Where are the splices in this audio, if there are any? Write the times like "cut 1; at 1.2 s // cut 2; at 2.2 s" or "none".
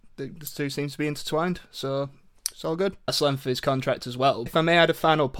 cut 1; at 3.1 s // cut 2; at 4.5 s